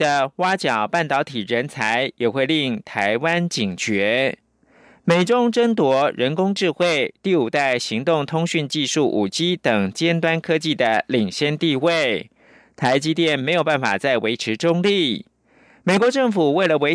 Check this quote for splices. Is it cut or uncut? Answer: uncut